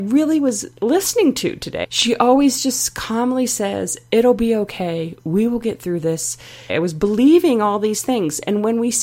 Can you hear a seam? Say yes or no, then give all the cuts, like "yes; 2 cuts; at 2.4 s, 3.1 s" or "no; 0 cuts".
yes; 2 cuts; at 1.8 s, 6.7 s